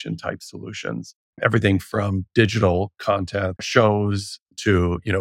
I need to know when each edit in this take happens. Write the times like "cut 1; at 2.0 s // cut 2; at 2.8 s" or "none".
cut 1; at 1.3 s // cut 2; at 3.6 s